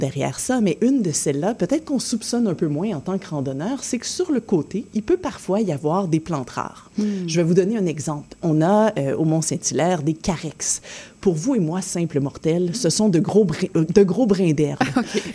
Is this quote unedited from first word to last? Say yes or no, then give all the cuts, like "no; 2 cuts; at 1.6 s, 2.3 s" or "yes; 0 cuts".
yes; 0 cuts